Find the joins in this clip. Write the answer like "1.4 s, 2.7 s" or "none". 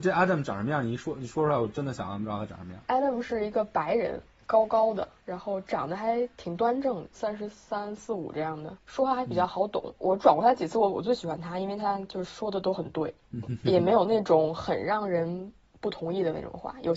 7.1 s

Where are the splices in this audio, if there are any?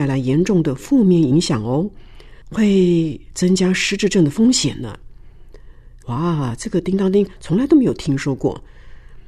6.0 s

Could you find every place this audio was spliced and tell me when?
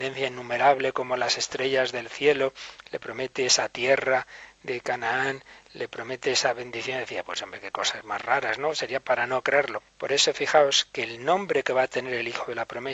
8.0 s, 9.8 s

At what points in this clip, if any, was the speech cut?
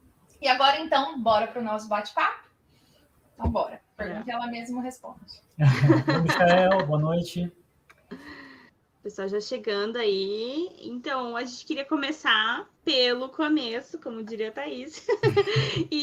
4.0 s

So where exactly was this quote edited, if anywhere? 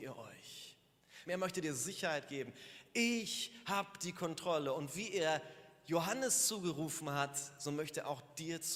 1.3 s

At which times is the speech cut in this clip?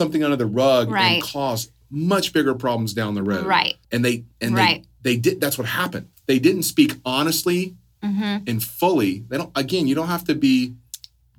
3.8 s, 6.1 s

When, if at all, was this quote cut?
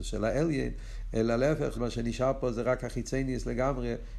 1.7 s

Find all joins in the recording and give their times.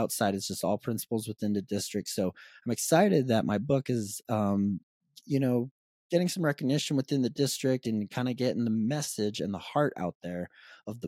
none

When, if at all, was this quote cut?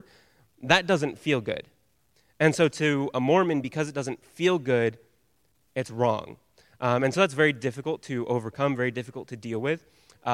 none

